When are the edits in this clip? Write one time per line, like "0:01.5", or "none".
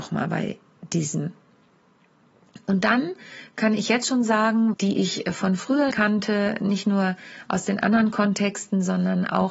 0:04.7
0:05.9